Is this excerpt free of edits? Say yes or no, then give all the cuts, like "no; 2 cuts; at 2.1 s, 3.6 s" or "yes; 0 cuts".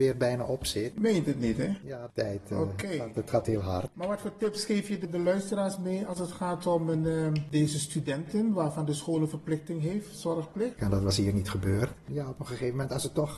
no; 1 cut; at 10.8 s